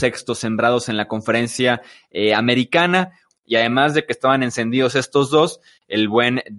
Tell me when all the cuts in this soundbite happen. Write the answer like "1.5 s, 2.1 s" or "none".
3.3 s